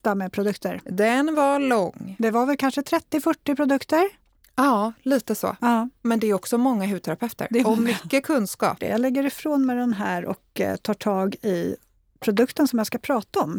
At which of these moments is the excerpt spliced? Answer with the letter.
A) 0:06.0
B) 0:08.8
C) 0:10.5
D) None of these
B